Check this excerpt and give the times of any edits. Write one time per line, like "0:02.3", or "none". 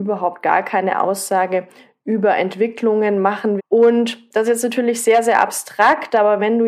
0:03.6